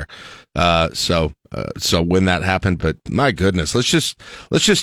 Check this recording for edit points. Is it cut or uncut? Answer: uncut